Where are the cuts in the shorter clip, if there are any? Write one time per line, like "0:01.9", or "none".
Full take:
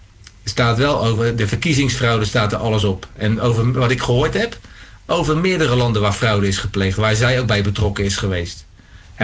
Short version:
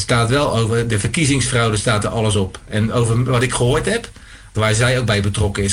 0:04.5